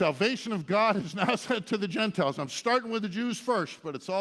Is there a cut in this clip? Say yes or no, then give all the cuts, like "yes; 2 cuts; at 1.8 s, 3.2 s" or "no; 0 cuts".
no; 0 cuts